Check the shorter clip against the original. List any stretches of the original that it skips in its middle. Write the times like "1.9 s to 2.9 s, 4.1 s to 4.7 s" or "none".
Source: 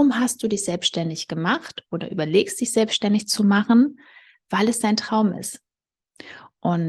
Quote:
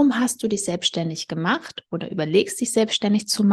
none